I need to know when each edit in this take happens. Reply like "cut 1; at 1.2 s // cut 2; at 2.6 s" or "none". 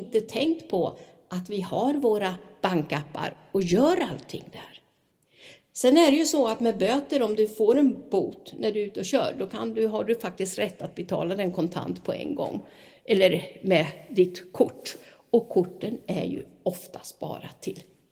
none